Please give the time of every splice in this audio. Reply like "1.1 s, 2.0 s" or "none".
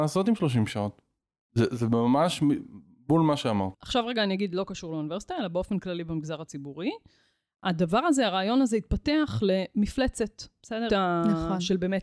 3.7 s, 10.9 s